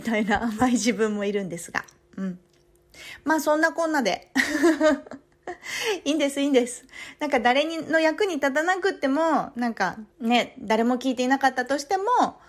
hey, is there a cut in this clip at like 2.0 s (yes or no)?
no